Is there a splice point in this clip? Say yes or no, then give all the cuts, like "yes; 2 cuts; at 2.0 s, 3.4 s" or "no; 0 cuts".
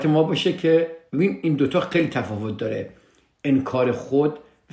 yes; 1 cut; at 1.1 s